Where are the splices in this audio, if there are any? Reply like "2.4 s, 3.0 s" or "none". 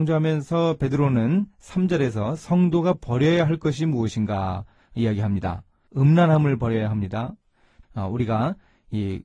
5.9 s, 7.8 s